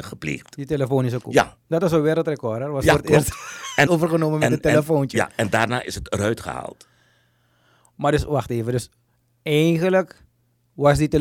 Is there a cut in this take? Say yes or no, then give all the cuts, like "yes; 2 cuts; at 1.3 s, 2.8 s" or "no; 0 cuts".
yes; 1 cut; at 3.9 s